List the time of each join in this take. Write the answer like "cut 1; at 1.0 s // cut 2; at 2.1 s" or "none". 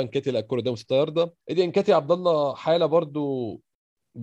cut 1; at 1.4 s